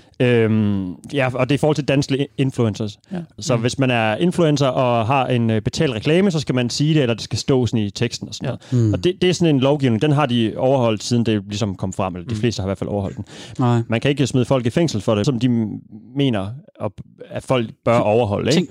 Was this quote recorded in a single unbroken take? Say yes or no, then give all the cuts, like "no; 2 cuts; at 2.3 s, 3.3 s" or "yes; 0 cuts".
no; 3 cuts; at 3.4 s, 13.6 s, 15.2 s